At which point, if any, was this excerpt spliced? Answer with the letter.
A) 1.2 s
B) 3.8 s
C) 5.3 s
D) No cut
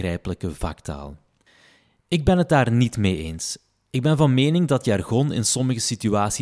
D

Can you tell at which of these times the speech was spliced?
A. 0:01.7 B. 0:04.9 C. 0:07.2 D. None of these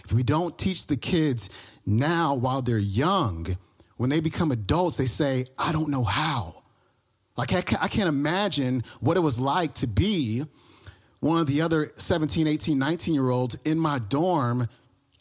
D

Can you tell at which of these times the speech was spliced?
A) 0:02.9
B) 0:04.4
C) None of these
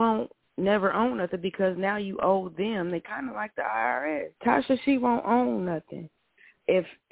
B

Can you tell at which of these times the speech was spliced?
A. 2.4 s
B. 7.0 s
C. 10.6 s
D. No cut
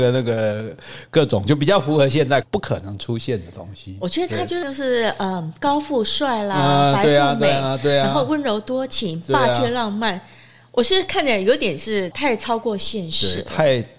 A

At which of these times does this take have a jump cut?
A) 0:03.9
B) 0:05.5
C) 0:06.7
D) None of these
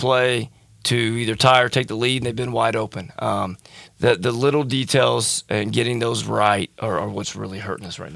A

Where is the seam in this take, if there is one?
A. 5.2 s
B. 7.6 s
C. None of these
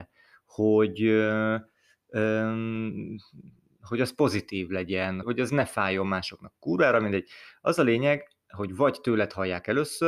A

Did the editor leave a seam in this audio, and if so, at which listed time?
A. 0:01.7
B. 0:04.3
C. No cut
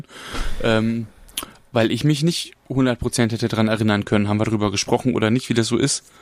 C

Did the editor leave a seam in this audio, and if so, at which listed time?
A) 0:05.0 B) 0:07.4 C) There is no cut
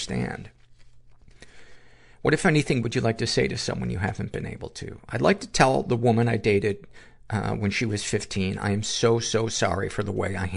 C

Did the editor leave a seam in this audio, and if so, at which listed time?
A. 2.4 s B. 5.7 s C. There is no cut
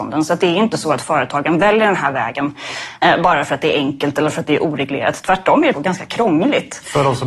B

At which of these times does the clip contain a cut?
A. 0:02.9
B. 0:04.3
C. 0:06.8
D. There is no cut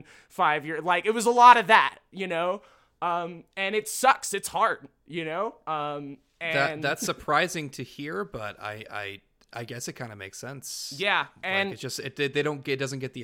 D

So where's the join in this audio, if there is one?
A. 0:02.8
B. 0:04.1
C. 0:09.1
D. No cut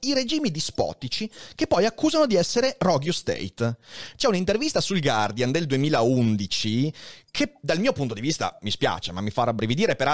B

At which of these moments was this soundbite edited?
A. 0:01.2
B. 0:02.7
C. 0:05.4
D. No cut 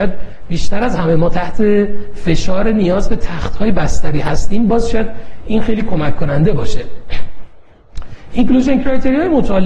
D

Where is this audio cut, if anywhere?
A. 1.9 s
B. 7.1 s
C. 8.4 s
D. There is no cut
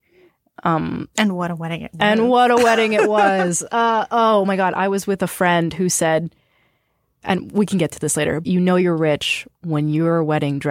C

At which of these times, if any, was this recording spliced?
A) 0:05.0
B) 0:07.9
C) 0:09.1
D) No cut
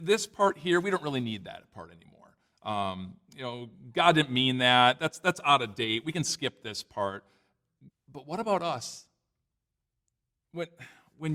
B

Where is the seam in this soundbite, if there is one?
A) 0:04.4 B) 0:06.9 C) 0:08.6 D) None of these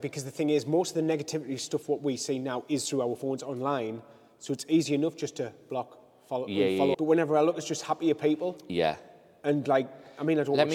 B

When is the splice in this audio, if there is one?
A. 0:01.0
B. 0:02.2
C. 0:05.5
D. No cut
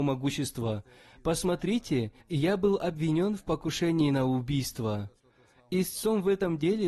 B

